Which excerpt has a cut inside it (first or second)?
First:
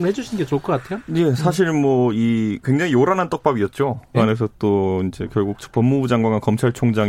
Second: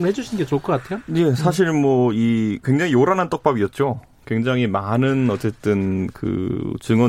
first